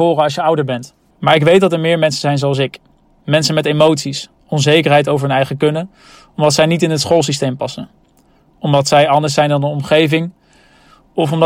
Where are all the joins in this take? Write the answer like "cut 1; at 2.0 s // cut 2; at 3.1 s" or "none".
cut 1; at 1.1 s